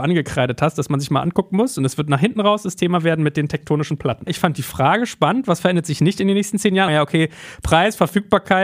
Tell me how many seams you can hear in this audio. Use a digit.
2